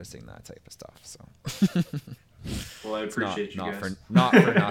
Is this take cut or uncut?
uncut